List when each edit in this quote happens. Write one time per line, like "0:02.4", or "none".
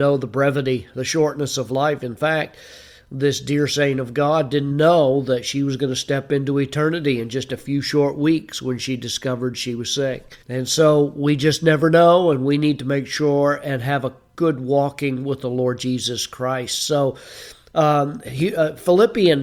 0:04.7
0:10.4